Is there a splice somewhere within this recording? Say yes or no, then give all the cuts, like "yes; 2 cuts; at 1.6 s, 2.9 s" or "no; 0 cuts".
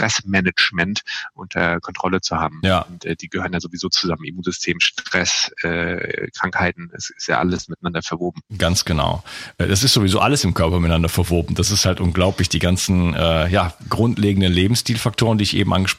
no; 0 cuts